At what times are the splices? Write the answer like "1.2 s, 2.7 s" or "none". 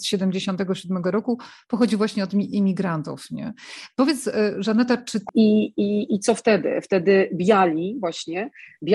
5.3 s